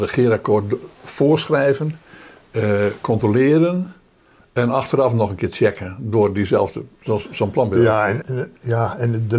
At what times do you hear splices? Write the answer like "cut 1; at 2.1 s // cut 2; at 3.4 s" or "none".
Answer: cut 1; at 7.0 s // cut 2; at 8.2 s